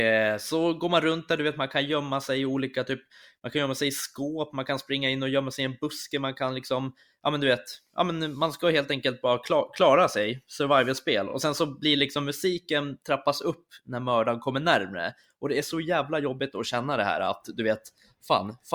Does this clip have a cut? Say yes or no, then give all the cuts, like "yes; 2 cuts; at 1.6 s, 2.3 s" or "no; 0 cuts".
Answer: no; 0 cuts